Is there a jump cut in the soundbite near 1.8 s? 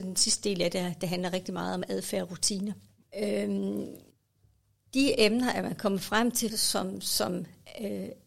no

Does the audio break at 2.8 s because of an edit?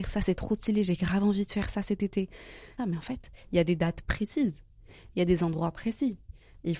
yes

